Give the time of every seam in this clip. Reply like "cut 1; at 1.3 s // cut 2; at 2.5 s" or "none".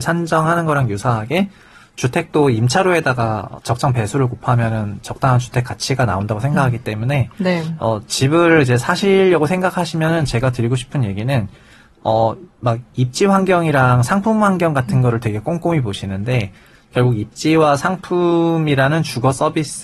none